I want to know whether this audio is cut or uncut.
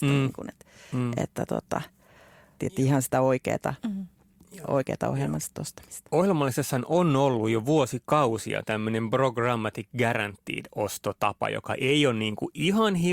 cut